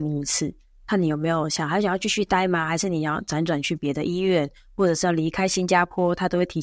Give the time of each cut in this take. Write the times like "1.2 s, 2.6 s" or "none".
none